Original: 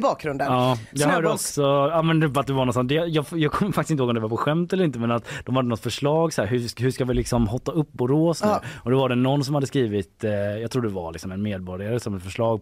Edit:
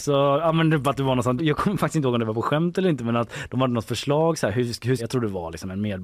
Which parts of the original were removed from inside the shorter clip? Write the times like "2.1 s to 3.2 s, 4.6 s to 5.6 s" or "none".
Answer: 2.9 s to 3.3 s, 6.9 s to 10.6 s